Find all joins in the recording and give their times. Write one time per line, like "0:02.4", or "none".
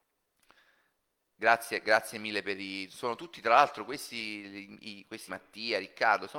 0:05.3

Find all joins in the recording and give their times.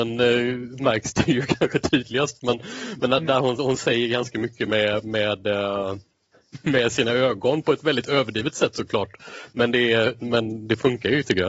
none

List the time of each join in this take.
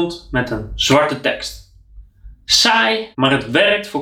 0:03.1

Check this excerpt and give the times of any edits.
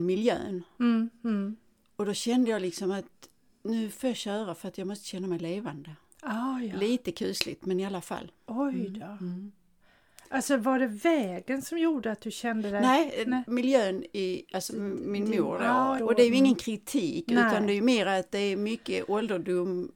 0:14.7
0:16.0

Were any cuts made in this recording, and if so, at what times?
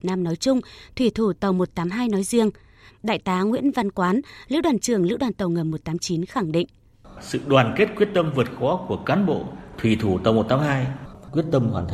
0:02.9

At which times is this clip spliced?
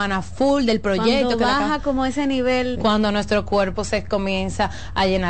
0:02.7

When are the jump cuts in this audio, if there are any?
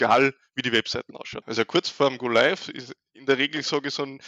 0:01.4

